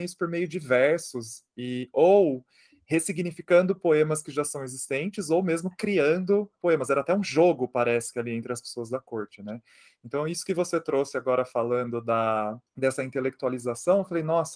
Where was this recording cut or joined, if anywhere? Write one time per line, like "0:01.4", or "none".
0:12.7